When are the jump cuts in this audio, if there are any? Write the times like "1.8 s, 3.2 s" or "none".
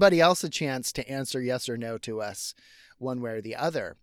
none